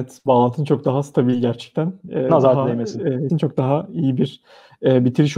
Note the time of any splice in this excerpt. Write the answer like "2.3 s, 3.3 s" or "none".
3.3 s